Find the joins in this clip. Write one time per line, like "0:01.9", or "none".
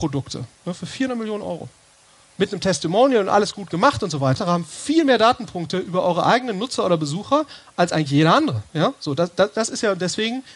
0:04.4